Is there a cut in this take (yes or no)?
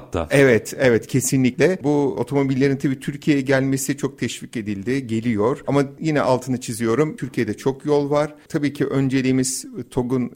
no